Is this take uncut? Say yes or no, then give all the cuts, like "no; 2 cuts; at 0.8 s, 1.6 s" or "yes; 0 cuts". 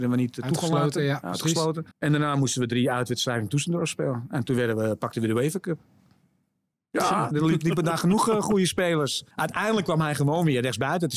no; 3 cuts; at 1.9 s, 7.3 s, 9.3 s